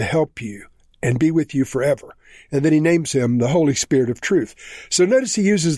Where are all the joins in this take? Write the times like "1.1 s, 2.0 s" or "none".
none